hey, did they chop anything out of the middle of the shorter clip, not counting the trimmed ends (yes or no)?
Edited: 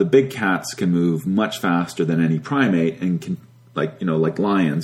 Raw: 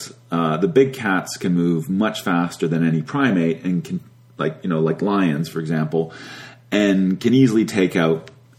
no